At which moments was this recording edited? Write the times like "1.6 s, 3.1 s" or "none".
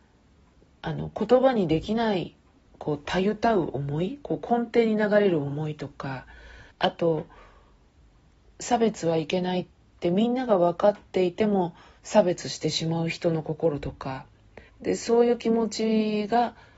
6.7 s, 14.7 s